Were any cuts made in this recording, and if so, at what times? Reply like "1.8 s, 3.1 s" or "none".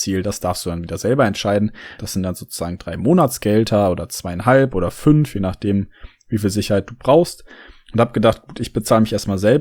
2.0 s